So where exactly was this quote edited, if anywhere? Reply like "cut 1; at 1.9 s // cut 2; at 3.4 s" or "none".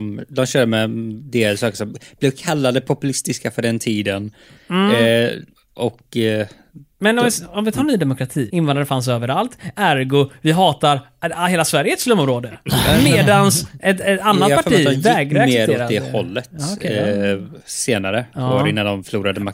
cut 1; at 8.5 s // cut 2; at 17.6 s